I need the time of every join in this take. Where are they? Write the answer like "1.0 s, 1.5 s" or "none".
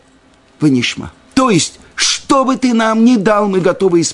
none